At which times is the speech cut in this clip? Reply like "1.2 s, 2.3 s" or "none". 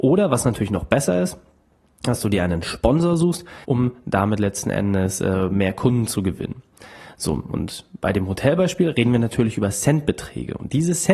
3.6 s